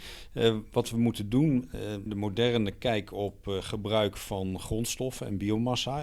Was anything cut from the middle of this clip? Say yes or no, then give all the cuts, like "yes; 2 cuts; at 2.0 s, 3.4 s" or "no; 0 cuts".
yes; 1 cut; at 2.1 s